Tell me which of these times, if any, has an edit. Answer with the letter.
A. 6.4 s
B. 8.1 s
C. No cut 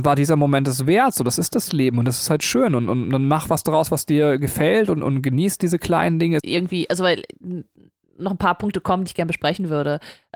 A